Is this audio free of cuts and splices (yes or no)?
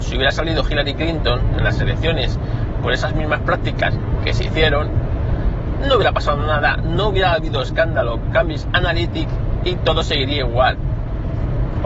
yes